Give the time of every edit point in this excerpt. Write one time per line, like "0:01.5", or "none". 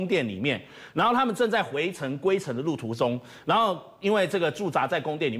none